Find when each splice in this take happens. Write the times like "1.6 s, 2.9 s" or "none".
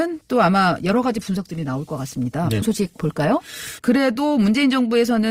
2.6 s, 3.8 s